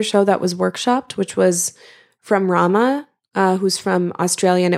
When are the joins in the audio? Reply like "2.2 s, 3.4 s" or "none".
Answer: none